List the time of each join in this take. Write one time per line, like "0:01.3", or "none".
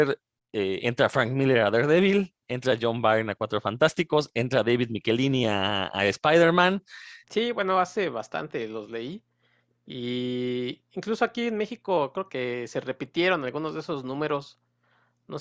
0:07.2
0:12.3